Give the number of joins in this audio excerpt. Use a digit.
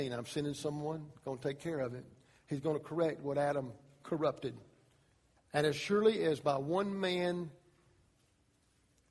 1